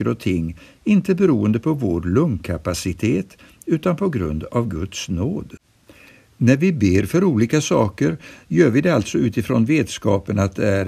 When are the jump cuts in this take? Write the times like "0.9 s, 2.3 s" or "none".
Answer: none